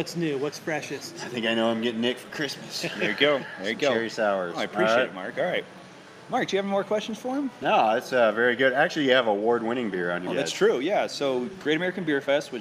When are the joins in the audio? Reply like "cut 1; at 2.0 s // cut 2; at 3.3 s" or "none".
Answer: cut 1; at 10.3 s

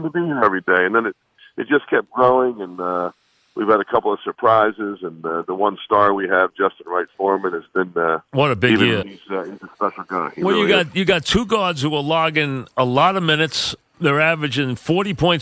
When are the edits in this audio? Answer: cut 1; at 9.0 s // cut 2; at 13.9 s

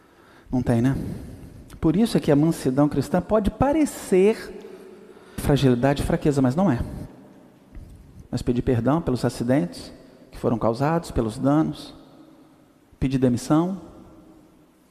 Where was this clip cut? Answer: cut 1; at 5.4 s // cut 2; at 8.2 s

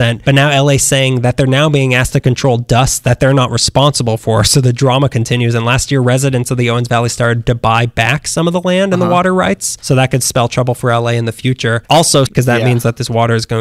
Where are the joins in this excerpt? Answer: cut 1; at 12.3 s

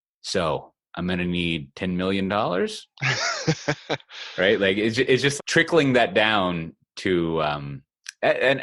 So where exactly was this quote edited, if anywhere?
cut 1; at 5.4 s

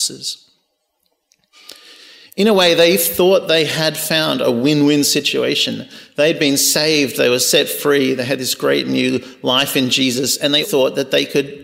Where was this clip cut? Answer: cut 1; at 10.6 s

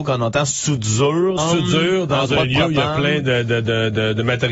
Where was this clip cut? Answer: cut 1; at 1.4 s

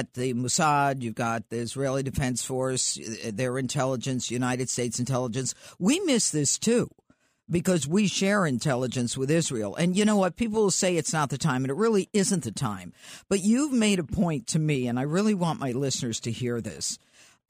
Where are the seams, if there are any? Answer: none

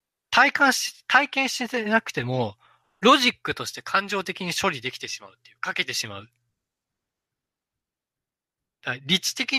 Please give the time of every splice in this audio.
none

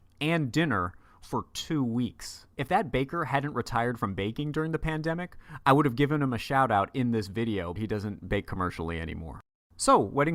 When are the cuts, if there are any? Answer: cut 1; at 7.8 s

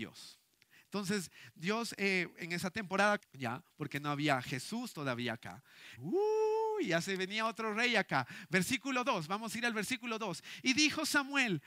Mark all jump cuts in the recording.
cut 1; at 3.2 s // cut 2; at 6.0 s

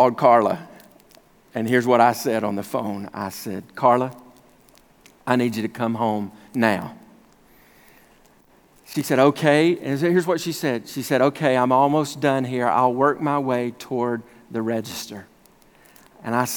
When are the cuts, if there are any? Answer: none

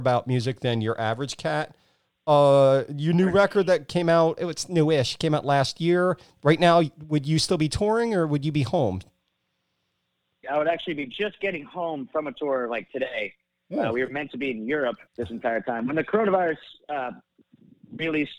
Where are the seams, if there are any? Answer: cut 1; at 4.4 s // cut 2; at 10.4 s // cut 3; at 15.1 s

